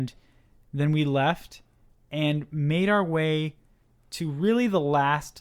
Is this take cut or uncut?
uncut